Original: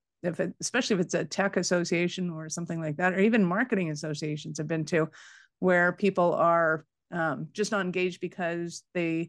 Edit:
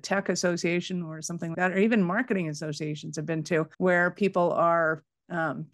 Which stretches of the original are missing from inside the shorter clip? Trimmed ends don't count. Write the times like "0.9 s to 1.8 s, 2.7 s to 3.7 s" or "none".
2.8 s to 3.0 s, 5.2 s to 5.6 s